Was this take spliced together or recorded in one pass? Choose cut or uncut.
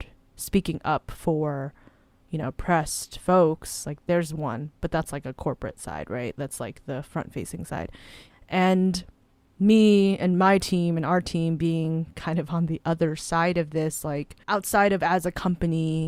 cut